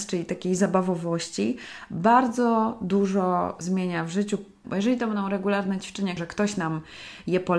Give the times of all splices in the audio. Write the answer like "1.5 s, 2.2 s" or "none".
4.6 s, 6.2 s